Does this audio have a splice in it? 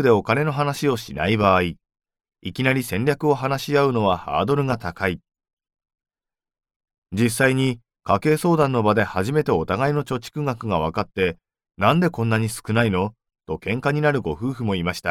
no; 0 cuts

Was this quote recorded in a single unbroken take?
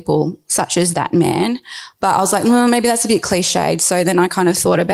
yes; 0 cuts

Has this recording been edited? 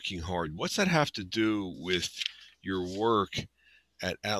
no; 0 cuts

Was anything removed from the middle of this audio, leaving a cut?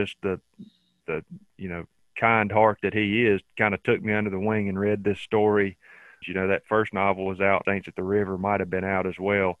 yes; 3 cuts; at 1.0 s, 6.2 s, 7.6 s

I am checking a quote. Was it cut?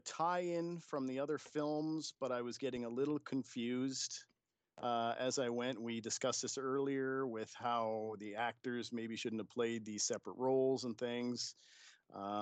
no; 0 cuts

